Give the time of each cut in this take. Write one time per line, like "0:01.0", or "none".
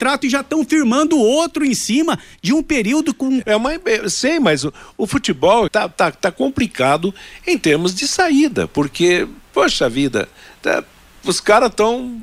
0:03.4
0:05.7